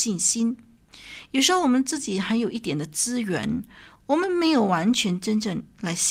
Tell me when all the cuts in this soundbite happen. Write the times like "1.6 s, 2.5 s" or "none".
4.0 s